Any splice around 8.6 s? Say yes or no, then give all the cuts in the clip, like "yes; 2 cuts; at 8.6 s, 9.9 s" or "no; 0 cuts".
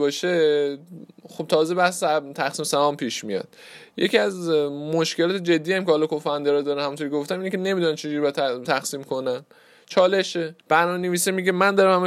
yes; 2 cuts; at 8.6 s, 10.6 s